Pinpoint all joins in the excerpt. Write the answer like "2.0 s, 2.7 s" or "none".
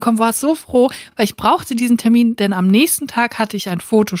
none